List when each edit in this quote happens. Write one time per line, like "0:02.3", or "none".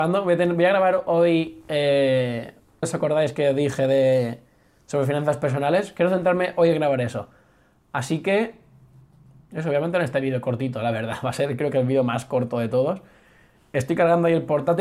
0:02.8